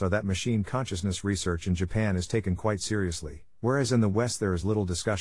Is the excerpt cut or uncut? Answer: uncut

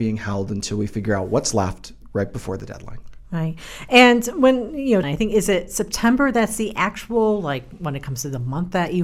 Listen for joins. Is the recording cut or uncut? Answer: cut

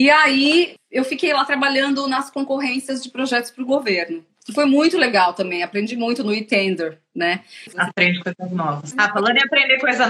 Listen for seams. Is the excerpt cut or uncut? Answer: cut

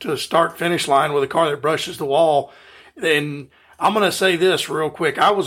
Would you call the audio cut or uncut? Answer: uncut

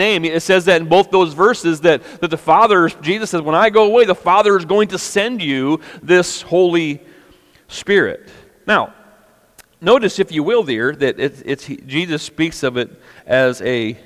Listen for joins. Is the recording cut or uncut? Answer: uncut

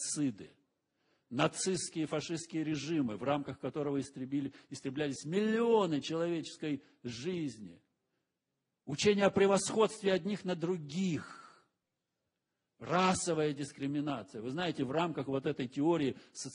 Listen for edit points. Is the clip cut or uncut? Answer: uncut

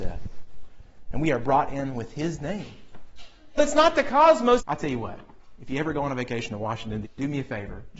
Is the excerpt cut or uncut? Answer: cut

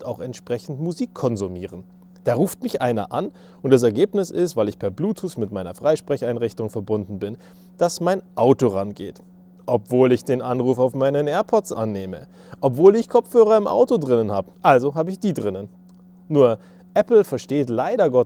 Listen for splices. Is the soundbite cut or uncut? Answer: cut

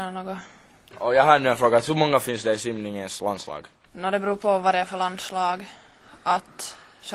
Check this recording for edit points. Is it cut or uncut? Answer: cut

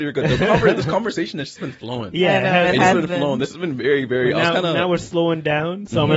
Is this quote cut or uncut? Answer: uncut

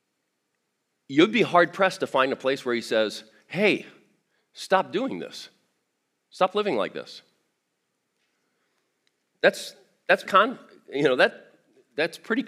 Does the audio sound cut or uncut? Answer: cut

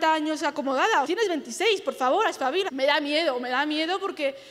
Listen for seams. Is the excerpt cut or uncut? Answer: cut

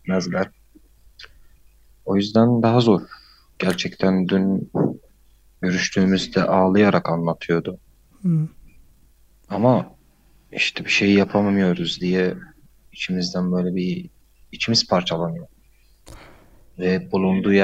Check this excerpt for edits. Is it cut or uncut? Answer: cut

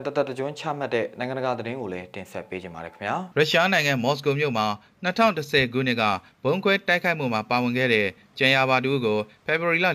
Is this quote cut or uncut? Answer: cut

